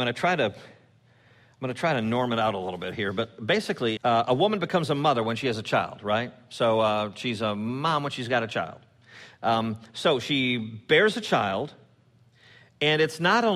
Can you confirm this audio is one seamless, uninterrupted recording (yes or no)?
no